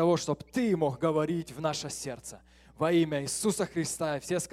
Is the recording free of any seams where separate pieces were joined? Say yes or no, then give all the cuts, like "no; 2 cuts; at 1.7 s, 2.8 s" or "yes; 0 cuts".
yes; 0 cuts